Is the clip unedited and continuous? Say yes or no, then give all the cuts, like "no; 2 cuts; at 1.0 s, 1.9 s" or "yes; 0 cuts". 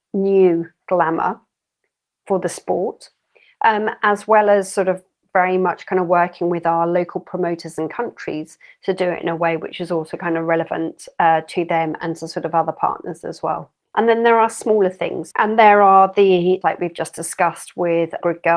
no; 3 cuts; at 13.8 s, 15.3 s, 16.6 s